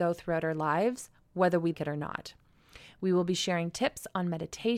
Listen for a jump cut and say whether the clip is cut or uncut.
cut